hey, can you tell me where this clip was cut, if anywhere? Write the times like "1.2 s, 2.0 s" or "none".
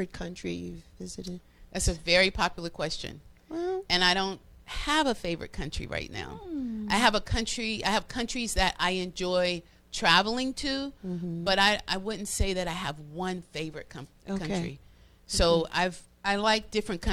16.0 s